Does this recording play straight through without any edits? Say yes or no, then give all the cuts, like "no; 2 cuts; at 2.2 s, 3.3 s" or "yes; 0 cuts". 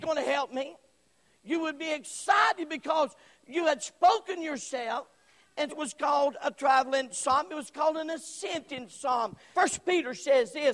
no; 2 cuts; at 5.7 s, 9.5 s